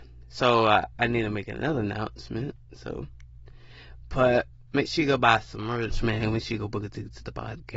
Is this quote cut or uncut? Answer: uncut